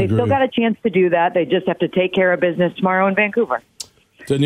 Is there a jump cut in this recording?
no; 0 cuts

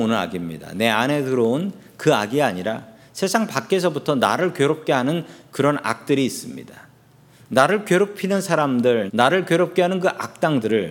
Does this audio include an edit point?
yes; 1 cut; at 9.1 s

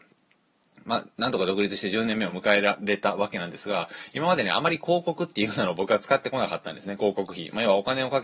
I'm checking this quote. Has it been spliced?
no; 0 cuts

